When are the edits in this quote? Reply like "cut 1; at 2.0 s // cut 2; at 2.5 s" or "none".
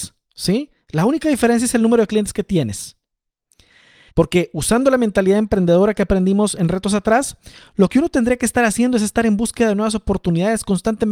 cut 1; at 4.1 s